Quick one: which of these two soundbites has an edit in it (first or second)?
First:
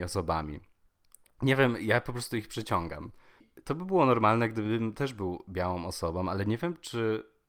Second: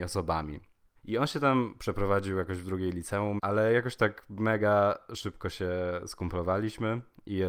second